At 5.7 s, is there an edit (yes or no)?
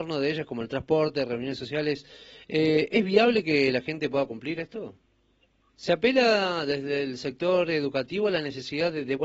yes